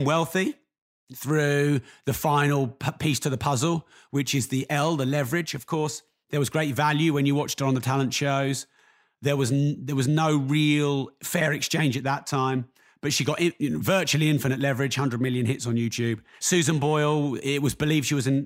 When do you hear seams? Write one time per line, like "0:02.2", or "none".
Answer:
0:16.4